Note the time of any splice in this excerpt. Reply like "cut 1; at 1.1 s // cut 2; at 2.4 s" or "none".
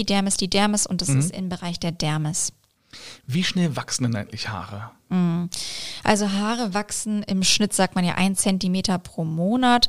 none